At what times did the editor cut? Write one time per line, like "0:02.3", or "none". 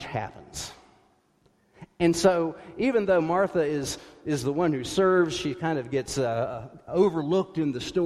none